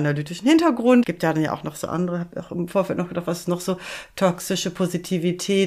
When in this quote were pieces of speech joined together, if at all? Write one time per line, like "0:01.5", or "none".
0:01.0